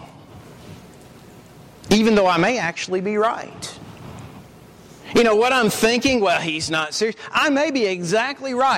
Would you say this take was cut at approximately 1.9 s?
no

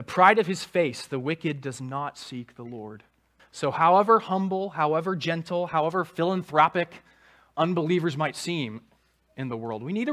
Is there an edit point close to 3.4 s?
yes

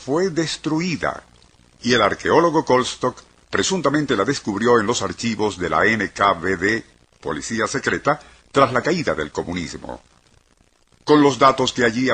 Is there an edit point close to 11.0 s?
no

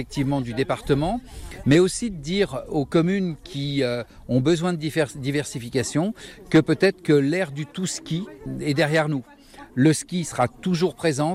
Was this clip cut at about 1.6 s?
yes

